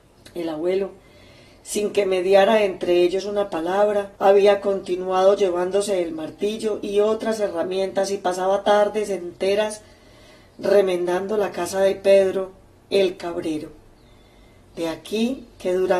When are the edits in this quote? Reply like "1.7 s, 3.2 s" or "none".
4.1 s